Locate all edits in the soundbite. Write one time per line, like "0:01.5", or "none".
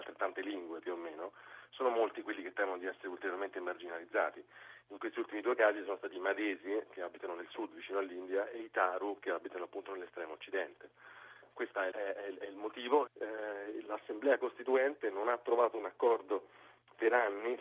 0:11.9
0:13.1